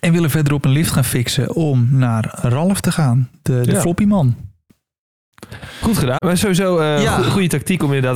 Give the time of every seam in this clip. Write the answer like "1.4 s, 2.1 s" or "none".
6.2 s